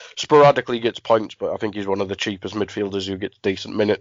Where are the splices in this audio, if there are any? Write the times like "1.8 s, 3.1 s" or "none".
none